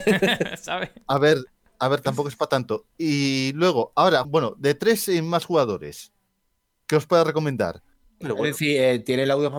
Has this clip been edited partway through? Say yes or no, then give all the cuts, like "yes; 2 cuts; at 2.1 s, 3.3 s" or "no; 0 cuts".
yes; 2 cuts; at 4.2 s, 8.2 s